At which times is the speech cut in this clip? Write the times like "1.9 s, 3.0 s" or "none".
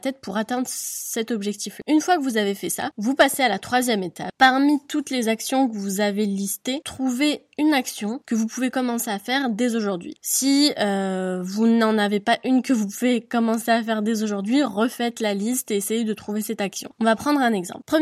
none